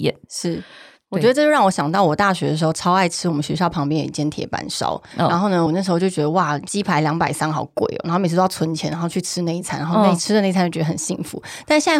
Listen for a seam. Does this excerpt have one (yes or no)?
no